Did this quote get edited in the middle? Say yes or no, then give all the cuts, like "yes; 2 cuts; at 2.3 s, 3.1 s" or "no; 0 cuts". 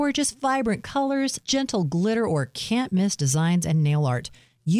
yes; 1 cut; at 1.4 s